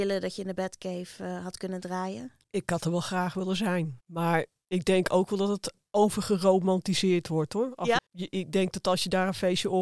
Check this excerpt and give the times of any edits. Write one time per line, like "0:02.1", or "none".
0:08.0